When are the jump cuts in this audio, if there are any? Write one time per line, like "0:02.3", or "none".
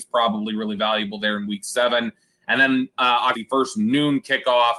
0:03.3